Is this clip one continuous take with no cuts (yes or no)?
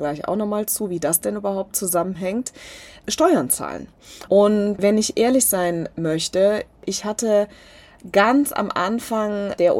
no